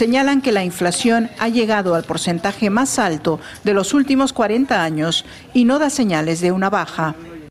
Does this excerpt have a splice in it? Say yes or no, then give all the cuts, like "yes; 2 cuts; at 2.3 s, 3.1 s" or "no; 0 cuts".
no; 0 cuts